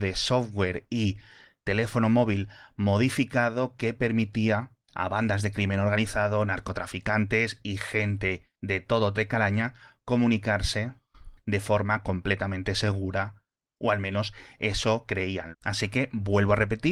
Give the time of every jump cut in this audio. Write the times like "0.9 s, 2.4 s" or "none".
9.1 s, 15.5 s